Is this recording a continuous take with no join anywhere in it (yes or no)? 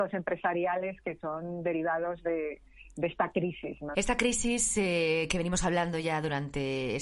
no